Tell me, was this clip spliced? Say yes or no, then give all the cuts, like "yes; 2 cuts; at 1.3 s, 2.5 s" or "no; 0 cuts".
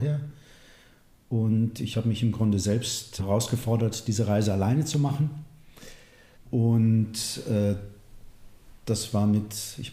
yes; 2 cuts; at 3.2 s, 6.3 s